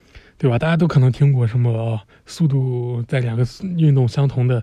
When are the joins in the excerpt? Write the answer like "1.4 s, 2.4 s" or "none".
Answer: none